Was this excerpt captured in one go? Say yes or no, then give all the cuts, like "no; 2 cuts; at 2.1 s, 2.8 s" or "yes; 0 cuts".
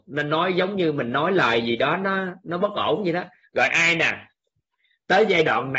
yes; 0 cuts